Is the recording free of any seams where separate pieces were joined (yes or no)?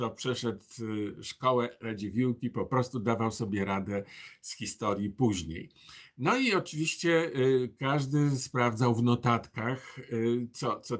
yes